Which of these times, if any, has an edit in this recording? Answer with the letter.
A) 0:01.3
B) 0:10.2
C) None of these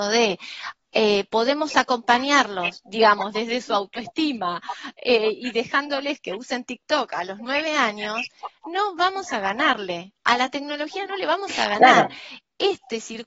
C